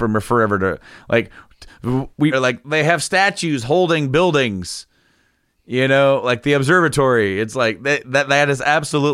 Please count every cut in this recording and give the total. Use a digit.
1